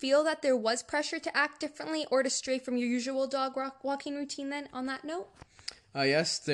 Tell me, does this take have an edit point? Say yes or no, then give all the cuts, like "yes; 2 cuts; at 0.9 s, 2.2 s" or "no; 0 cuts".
no; 0 cuts